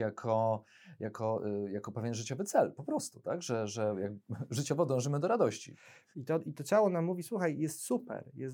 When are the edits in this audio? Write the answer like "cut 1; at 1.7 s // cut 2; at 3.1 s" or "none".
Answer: cut 1; at 6.1 s